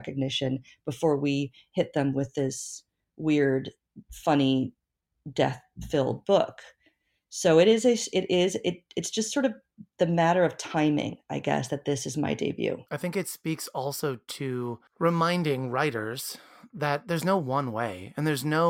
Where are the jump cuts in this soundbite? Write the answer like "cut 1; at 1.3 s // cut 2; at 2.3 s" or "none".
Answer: cut 1; at 12.9 s // cut 2; at 14.9 s